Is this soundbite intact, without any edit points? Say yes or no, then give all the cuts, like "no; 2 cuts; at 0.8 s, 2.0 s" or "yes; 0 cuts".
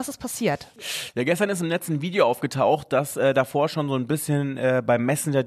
yes; 0 cuts